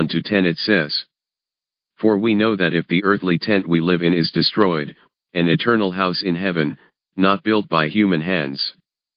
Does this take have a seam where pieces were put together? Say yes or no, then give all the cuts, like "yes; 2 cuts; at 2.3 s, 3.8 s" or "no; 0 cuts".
yes; 1 cut; at 5.1 s